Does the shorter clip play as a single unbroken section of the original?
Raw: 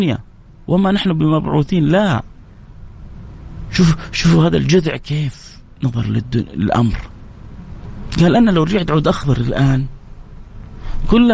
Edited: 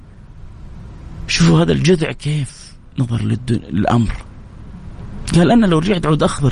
no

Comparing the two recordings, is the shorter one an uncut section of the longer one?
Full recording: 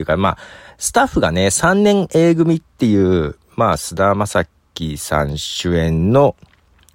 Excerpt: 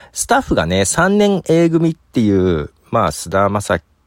yes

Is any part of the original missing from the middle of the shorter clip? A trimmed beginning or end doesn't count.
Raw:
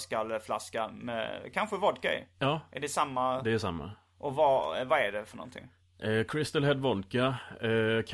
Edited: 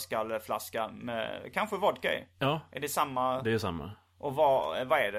no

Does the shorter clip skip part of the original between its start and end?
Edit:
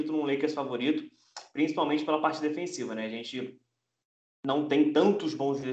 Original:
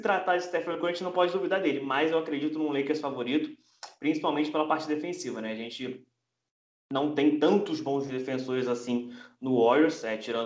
no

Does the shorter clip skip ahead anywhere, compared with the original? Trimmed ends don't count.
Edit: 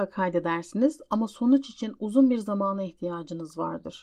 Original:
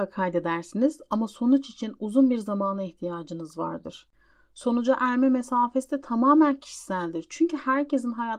no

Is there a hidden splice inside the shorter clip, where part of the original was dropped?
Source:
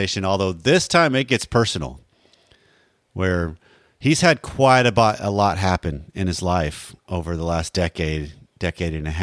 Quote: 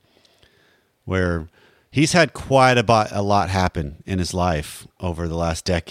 no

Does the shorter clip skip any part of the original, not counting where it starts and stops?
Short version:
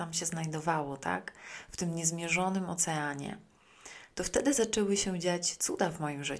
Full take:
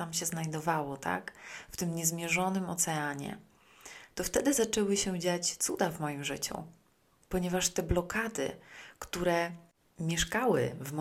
no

